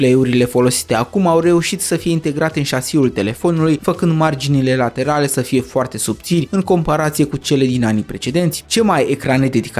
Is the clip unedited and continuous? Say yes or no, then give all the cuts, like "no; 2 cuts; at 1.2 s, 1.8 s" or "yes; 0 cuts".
no; 1 cut; at 3.8 s